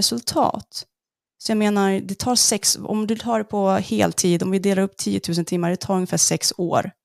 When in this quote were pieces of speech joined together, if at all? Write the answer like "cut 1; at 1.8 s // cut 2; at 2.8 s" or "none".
cut 1; at 1.3 s